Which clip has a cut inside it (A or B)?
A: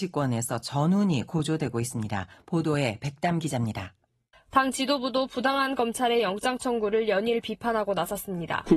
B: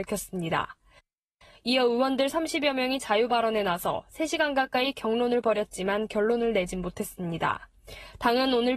A